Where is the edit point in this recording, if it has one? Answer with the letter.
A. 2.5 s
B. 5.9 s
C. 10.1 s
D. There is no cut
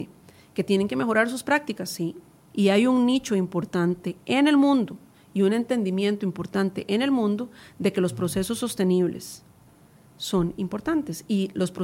A